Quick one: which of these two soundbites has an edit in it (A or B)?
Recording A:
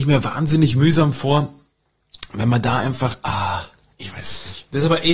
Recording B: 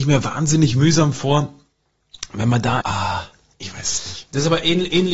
B